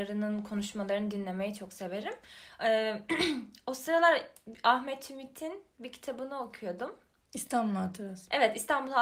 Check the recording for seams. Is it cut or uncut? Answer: uncut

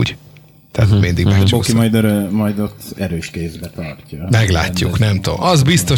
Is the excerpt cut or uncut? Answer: uncut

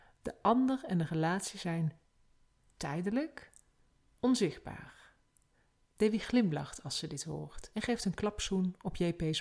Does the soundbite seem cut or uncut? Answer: cut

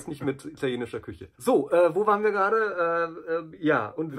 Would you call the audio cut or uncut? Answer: cut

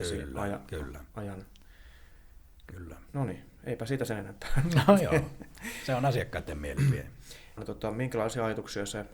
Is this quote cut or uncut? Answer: cut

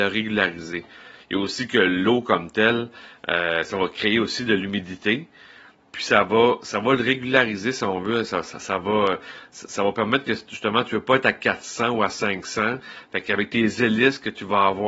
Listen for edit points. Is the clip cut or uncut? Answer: uncut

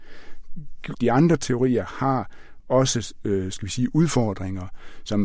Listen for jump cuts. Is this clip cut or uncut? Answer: cut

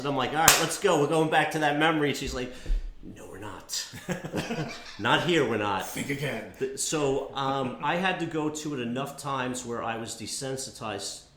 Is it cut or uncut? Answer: uncut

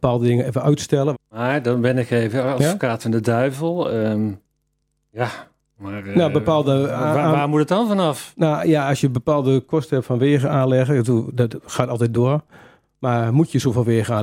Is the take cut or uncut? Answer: cut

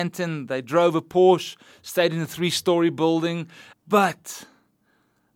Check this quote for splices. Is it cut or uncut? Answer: cut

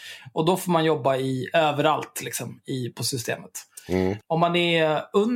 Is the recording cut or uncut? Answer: uncut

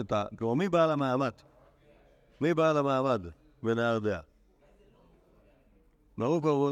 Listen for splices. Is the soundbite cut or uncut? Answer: uncut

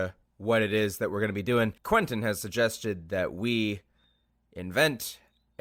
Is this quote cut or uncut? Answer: cut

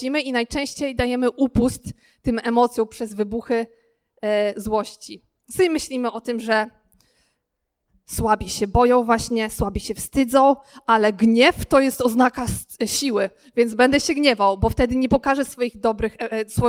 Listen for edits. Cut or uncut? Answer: uncut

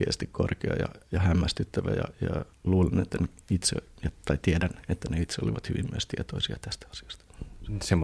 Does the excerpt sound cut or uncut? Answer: uncut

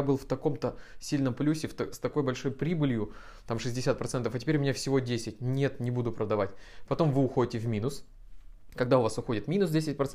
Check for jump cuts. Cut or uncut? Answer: uncut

